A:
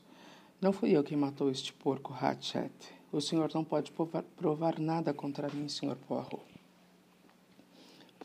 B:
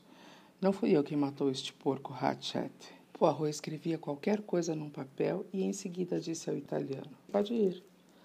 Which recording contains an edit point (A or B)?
B